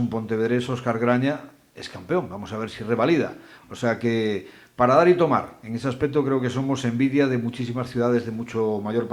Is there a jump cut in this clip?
no; 0 cuts

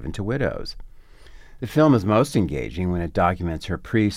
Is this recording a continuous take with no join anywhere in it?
no; 1 cut; at 1.6 s

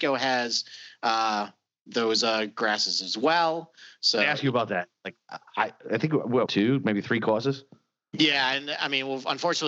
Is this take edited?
yes; 1 cut; at 6.5 s

